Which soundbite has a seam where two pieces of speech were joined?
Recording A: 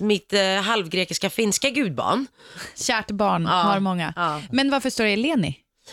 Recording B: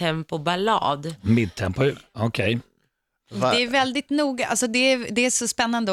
A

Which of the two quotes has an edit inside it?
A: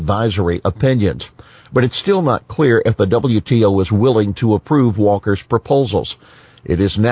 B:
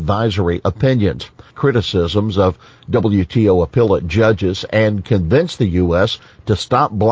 B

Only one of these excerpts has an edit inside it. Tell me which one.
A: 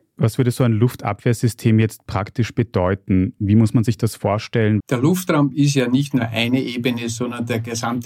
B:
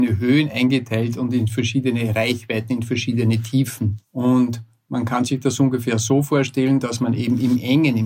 A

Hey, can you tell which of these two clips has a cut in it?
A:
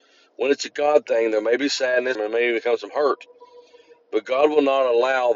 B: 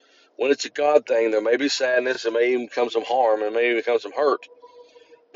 A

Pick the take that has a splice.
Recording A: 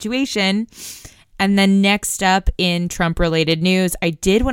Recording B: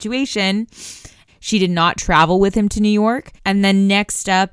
B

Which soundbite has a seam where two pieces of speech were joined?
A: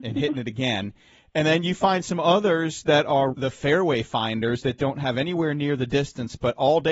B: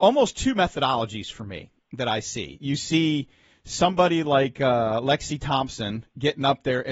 A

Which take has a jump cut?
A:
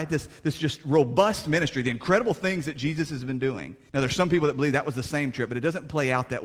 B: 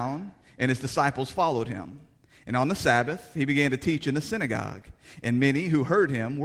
A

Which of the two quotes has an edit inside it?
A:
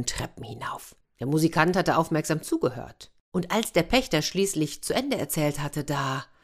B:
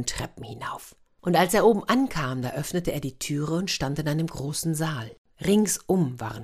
A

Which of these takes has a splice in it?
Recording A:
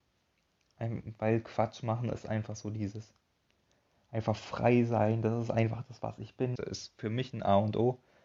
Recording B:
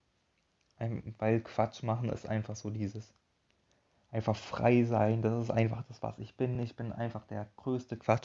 A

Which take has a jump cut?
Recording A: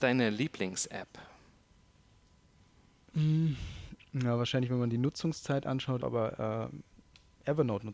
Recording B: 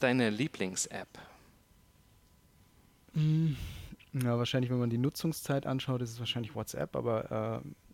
A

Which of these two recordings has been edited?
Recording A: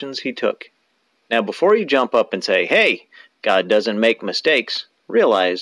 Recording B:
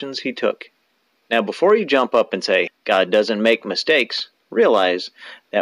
B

